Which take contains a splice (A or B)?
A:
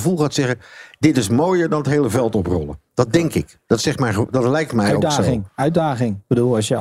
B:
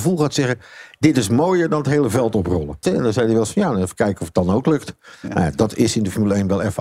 B